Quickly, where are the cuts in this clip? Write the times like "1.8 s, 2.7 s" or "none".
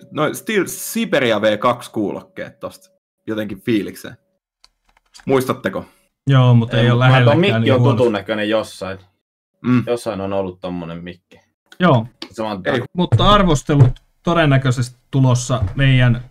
12.8 s